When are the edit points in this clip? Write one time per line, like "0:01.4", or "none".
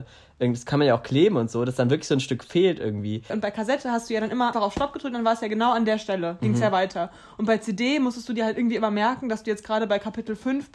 0:03.3
0:04.5